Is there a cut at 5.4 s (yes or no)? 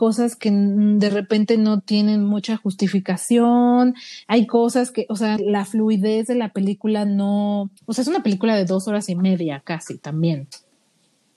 yes